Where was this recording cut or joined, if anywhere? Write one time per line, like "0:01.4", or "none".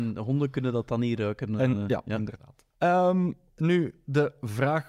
0:02.7